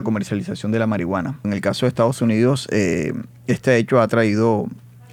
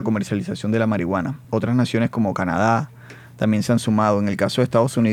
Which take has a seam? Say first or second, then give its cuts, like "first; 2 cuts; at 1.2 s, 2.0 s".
first; 1 cut; at 1.4 s